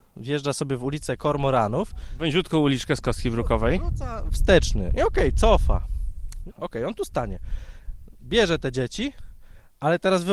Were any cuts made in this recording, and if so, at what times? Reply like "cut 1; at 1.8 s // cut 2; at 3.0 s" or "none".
cut 1; at 6.5 s